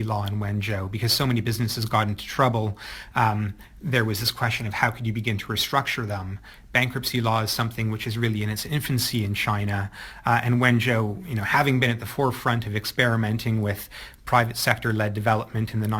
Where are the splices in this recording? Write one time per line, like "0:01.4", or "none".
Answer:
none